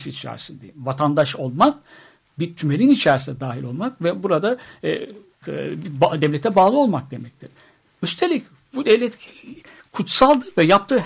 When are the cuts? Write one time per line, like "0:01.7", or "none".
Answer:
0:05.4